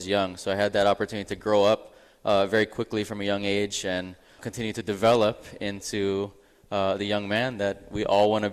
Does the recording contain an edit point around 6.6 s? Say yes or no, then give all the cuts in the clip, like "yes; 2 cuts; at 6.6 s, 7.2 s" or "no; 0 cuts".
no; 1 cut; at 4.4 s